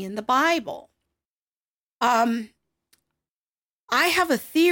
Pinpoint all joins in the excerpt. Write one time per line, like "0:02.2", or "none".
0:01.9

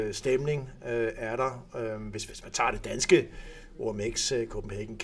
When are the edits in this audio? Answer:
0:02.3

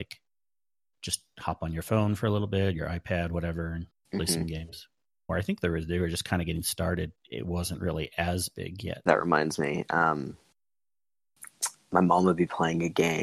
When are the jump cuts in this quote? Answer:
0:05.3
0:07.2
0:09.1

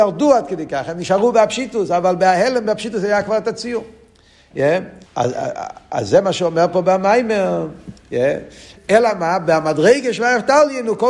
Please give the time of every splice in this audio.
0:05.1
0:08.8

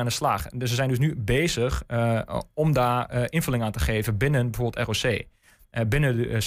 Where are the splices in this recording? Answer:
none

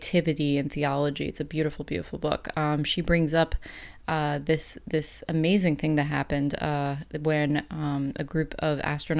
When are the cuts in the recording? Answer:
none

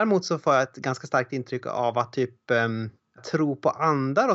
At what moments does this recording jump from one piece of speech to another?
0:03.2

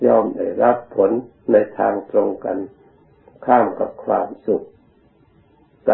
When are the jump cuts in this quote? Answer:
none

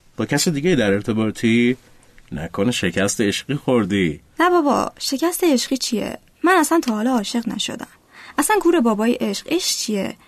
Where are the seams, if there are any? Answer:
none

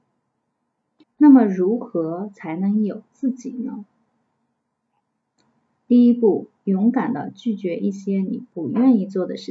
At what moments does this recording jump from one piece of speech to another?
0:01.0

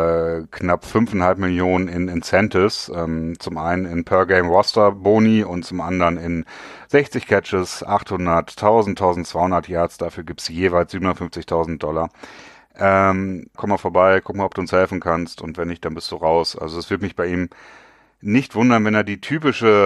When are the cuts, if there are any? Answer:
0:13.6

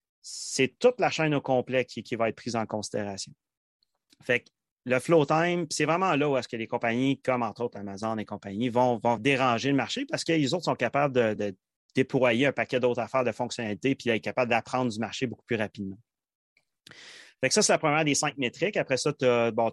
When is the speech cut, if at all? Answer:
0:09.2
0:11.4

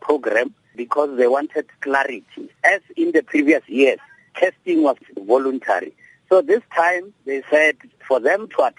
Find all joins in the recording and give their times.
none

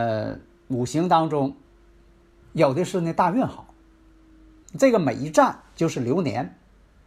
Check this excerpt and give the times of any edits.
0:02.4
0:04.6

